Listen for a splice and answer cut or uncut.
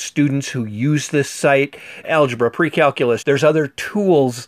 cut